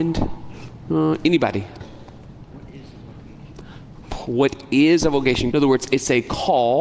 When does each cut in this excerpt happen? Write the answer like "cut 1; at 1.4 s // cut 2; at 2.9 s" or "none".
cut 1; at 1.8 s // cut 2; at 5.5 s